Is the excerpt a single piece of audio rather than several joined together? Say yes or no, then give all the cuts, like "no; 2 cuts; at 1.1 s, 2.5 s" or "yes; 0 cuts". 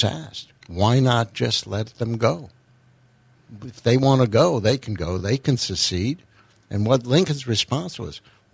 yes; 0 cuts